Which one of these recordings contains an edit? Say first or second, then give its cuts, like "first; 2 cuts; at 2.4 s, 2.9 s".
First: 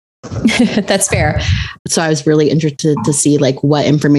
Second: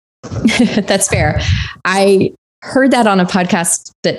first; 1 cut; at 1.8 s